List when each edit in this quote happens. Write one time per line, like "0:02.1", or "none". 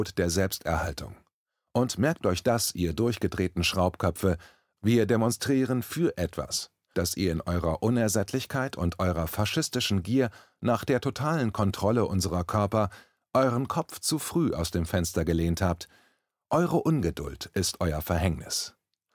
0:04.8
0:06.9